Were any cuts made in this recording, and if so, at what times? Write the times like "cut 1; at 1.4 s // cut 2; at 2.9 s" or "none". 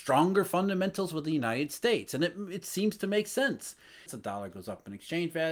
cut 1; at 4.1 s